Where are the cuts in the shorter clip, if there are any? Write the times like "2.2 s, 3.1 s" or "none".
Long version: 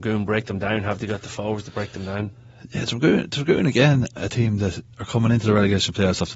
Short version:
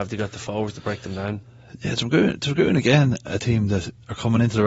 none